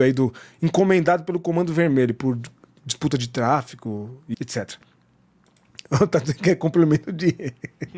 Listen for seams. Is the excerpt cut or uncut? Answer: cut